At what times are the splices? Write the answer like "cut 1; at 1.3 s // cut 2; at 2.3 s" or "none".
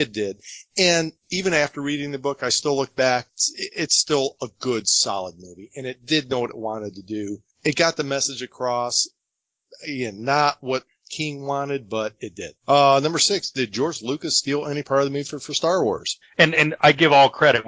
cut 1; at 12.6 s // cut 2; at 16.2 s